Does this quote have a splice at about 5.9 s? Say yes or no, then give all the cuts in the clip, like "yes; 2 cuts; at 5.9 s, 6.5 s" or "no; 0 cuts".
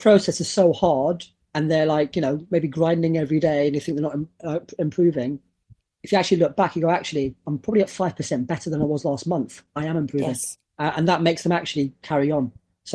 no; 1 cut; at 10.7 s